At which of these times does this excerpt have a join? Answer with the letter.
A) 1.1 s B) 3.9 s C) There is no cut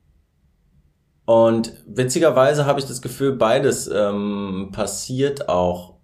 C